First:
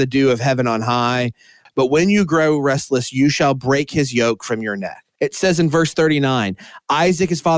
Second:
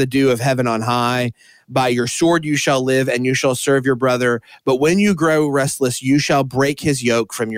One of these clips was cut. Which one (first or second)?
first